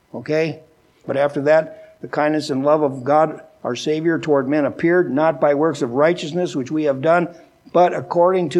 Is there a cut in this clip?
yes; 1 cut; at 1.0 s

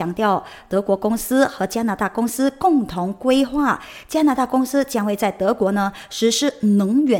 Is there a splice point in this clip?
no; 0 cuts

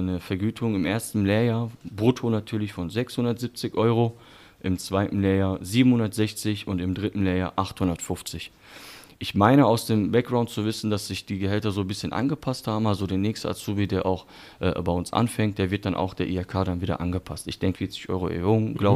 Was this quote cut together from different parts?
yes; 1 cut; at 17.7 s

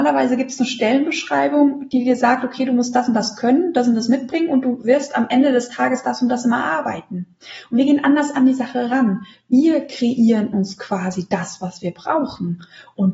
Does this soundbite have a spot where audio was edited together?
no; 0 cuts

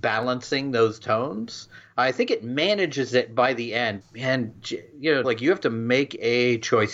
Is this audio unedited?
no; 2 cuts; at 4.0 s, 5.2 s

